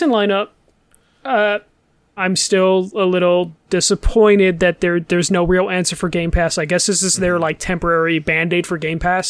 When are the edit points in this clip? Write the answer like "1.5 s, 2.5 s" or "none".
2.2 s